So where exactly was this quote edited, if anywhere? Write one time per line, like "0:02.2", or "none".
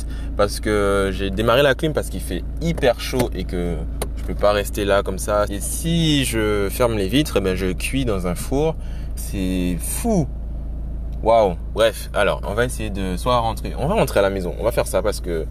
0:05.5
0:09.2
0:12.4